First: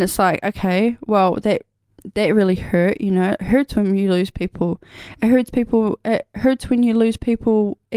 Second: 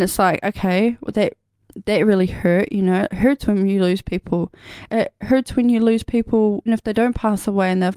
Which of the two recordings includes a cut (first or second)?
second